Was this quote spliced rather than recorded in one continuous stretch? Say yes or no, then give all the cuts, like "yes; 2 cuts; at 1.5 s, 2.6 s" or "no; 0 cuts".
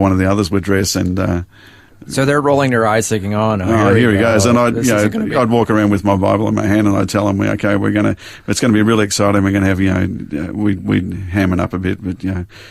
no; 0 cuts